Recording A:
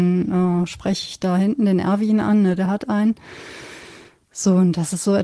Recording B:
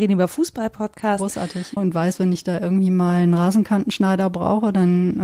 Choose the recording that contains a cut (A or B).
B